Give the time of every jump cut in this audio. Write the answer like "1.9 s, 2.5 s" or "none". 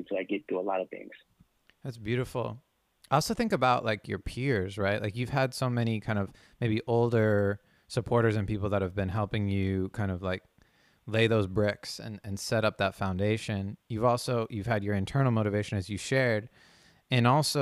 none